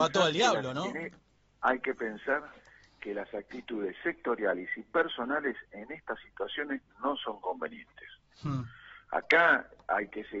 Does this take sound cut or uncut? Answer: uncut